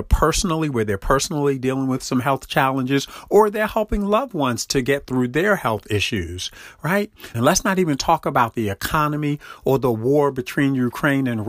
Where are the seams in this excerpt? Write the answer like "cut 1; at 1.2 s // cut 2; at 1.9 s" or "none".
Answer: cut 1; at 7.3 s